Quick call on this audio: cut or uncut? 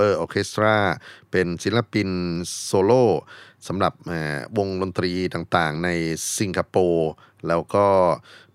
uncut